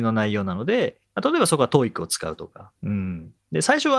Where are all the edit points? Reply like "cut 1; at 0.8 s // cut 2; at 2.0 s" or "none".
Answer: cut 1; at 2.7 s